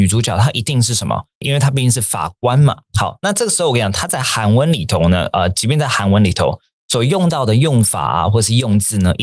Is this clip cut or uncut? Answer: cut